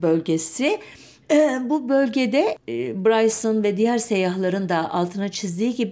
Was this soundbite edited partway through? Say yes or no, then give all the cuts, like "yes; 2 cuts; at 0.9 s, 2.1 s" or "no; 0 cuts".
yes; 1 cut; at 1.2 s